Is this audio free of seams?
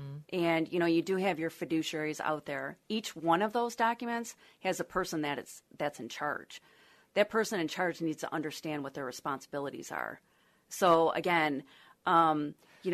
yes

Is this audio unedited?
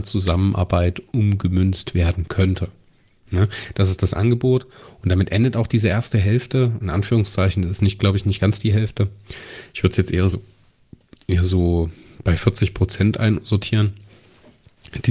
yes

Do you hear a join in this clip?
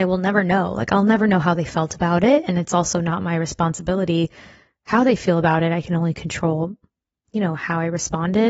no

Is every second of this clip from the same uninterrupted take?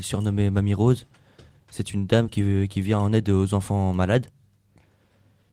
yes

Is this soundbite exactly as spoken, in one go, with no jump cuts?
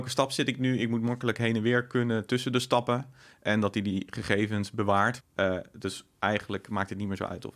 no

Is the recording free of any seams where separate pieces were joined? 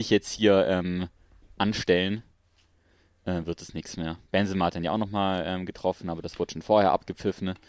yes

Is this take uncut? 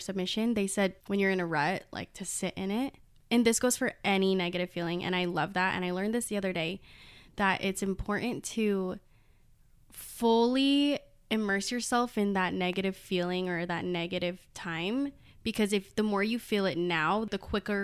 yes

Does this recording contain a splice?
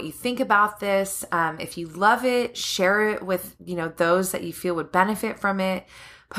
no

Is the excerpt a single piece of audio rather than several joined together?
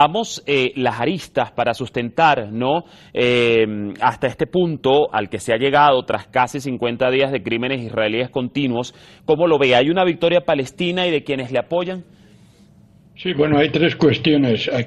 yes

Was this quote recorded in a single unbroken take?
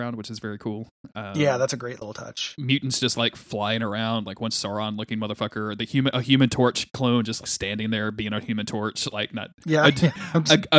no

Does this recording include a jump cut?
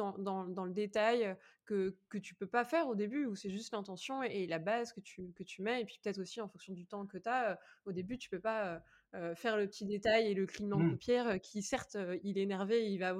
no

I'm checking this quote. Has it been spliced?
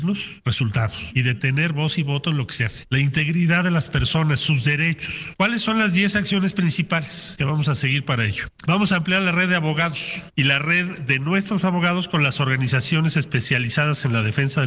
yes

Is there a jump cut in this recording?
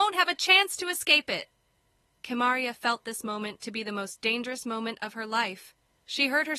no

